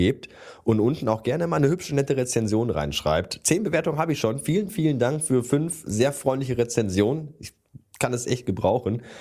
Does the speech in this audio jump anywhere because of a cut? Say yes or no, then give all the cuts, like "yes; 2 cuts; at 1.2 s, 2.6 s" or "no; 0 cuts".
yes; 1 cut; at 4.7 s